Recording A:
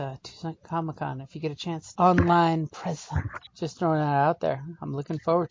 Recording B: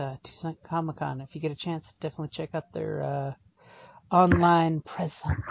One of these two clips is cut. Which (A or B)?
A